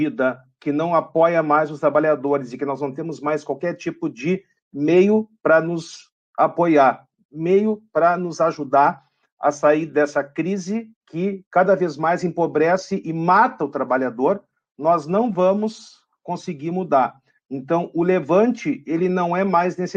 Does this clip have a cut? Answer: no; 0 cuts

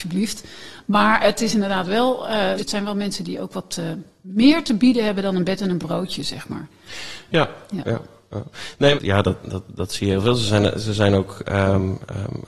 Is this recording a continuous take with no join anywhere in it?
no; 2 cuts; at 2.6 s, 8.9 s

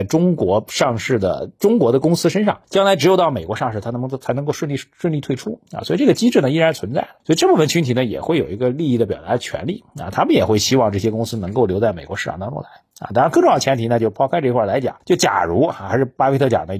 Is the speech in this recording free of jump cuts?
yes; 0 cuts

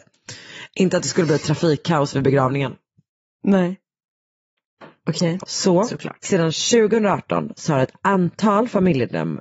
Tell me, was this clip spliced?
yes; 1 cut; at 5.4 s

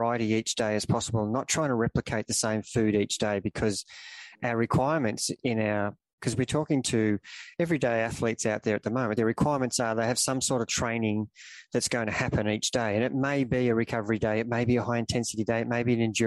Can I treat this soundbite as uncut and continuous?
yes; 0 cuts

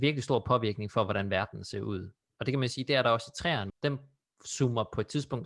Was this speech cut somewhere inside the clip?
yes; 1 cut; at 3.7 s

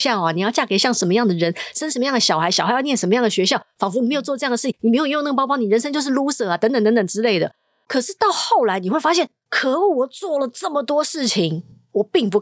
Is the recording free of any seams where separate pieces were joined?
yes; 0 cuts

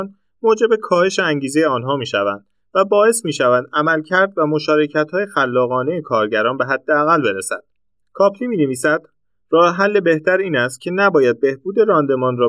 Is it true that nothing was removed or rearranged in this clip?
yes; 0 cuts

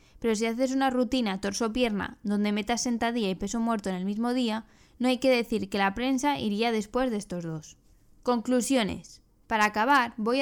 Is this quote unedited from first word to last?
yes; 0 cuts

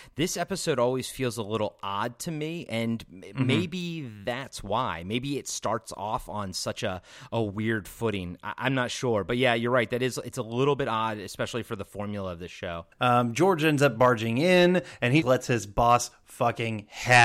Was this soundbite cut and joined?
yes; 2 cuts; at 12.9 s, 15.2 s

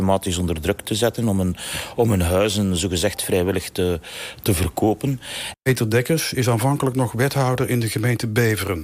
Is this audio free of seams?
no; 1 cut; at 5.5 s

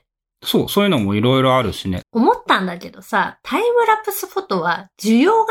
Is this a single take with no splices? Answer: no; 1 cut; at 2.0 s

